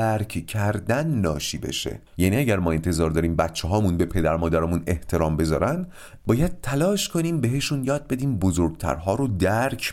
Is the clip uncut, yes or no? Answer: no